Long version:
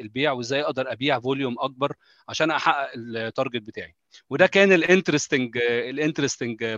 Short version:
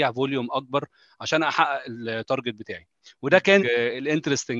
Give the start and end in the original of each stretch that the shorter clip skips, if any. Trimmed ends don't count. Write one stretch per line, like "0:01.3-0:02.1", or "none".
0:04.7-0:05.5